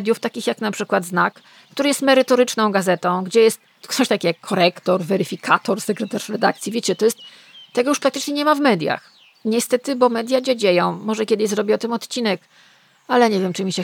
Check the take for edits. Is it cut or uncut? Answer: uncut